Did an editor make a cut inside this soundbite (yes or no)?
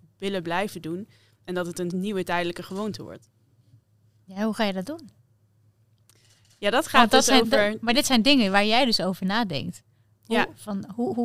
no